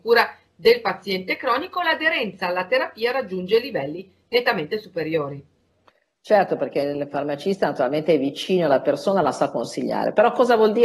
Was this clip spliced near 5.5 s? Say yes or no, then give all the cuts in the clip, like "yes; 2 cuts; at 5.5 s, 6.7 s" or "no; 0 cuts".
no; 0 cuts